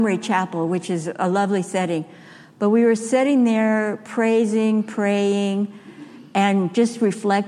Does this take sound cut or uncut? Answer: uncut